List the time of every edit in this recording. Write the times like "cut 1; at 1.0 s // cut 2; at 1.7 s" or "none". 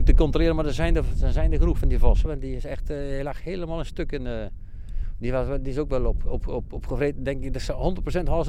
cut 1; at 2.3 s